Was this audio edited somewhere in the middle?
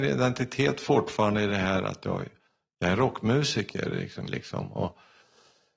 yes; 1 cut; at 4.3 s

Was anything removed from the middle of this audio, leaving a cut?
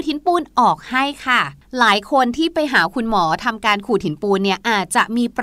no; 0 cuts

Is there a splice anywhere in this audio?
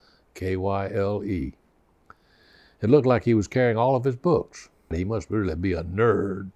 yes; 1 cut; at 4.9 s

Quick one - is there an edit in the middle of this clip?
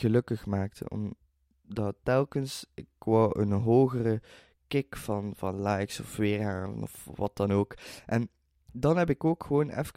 no; 0 cuts

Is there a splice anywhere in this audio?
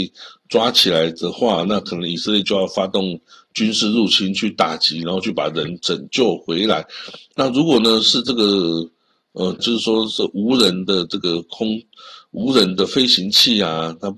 yes; 2 cuts; at 5.8 s, 9.6 s

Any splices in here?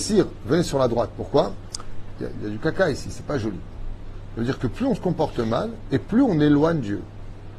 yes; 1 cut; at 2.3 s

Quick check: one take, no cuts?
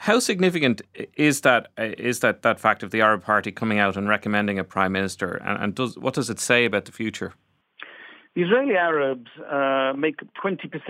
yes; 0 cuts

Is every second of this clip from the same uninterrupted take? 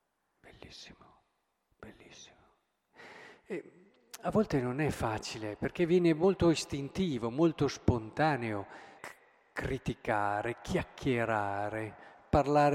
no; 1 cut; at 9.0 s

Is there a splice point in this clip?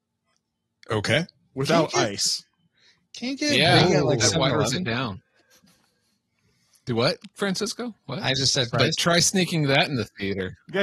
yes; 1 cut; at 8.7 s

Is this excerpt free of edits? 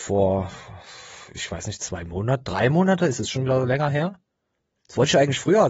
yes; 0 cuts

